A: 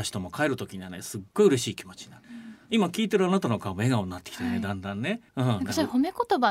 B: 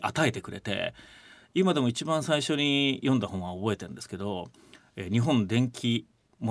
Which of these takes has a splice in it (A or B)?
A